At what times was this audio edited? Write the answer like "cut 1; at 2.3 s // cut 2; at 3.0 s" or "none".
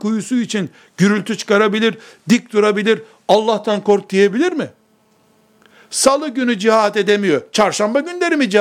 none